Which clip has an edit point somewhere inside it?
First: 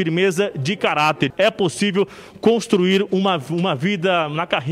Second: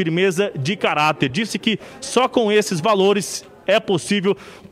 first; 1 cut; at 1.3 s

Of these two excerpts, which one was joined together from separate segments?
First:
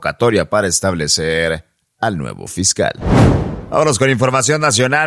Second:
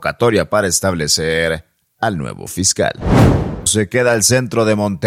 second; 1 cut; at 3.7 s

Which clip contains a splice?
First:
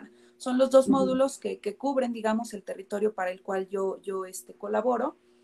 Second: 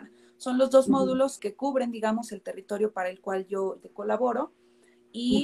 second; 2 cuts; at 1.4 s, 3.8 s

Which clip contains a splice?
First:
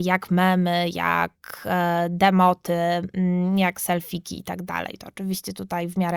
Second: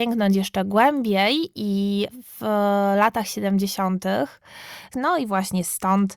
second; 1 cut; at 4.9 s

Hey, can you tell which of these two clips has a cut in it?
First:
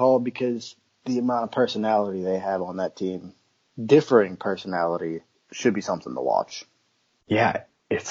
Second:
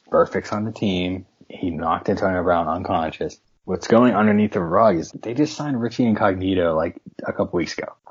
second; 1 cut; at 5.1 s

